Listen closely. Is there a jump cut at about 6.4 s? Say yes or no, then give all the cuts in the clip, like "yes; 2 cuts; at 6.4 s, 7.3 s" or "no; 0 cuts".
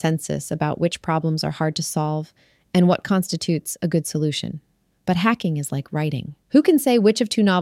yes; 1 cut; at 6.4 s